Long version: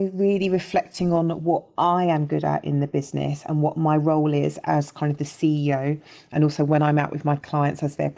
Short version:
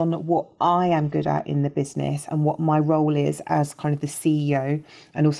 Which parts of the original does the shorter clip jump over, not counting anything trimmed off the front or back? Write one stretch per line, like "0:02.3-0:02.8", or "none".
none